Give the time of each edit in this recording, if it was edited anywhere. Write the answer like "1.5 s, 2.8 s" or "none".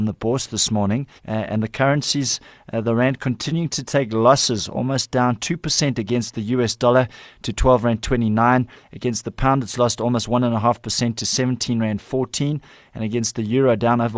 1.2 s